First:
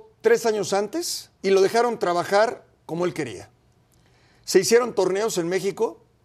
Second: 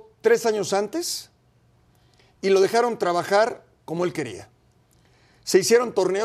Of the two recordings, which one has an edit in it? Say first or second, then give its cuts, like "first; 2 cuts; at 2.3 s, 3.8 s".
first; 1 cut; at 1.4 s